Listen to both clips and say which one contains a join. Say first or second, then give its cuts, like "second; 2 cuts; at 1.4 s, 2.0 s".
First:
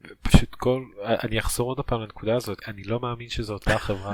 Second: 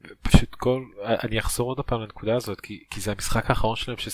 first; 1 cut; at 2.6 s